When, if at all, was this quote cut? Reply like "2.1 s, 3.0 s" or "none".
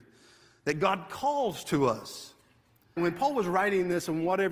3.0 s